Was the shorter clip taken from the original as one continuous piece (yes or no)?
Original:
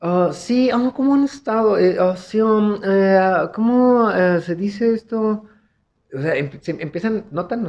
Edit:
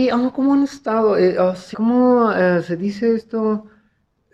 no